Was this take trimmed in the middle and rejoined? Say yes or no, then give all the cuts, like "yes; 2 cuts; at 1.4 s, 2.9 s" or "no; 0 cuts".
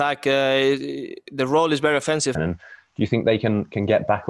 yes; 1 cut; at 2.3 s